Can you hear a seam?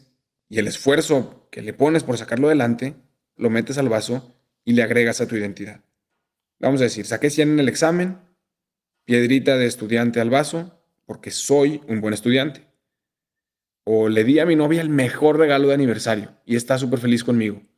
yes; 1 cut; at 3.4 s

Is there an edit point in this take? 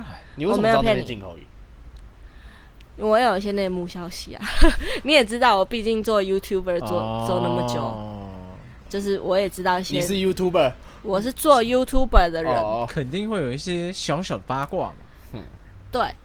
no; 0 cuts

